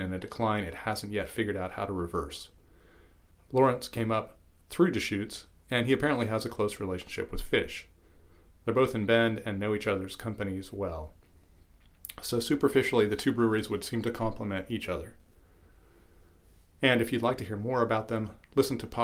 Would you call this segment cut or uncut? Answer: uncut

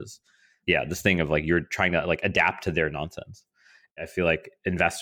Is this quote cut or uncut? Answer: cut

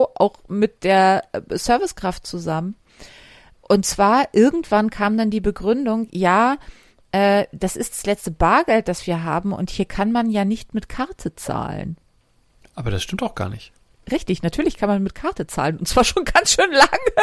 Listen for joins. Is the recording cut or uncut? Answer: uncut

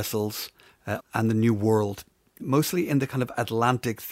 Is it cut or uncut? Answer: cut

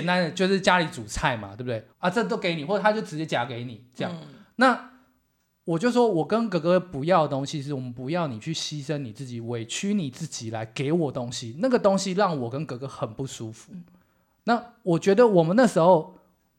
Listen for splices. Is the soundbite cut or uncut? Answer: cut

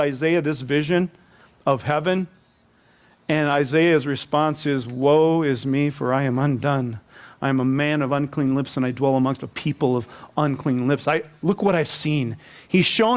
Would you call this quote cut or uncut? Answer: uncut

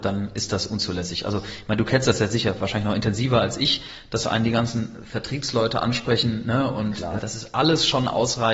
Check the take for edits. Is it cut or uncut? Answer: cut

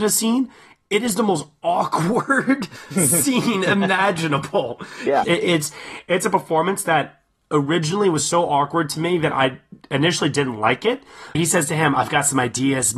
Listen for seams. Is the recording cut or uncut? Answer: cut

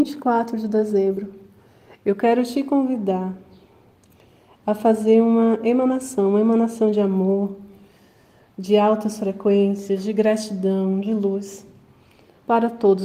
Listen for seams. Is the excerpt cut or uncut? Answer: uncut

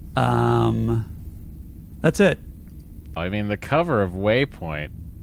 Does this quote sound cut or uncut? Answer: cut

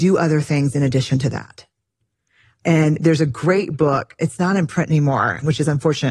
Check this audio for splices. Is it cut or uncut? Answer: uncut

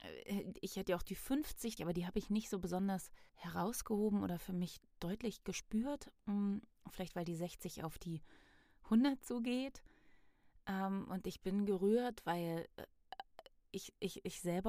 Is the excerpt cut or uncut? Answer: cut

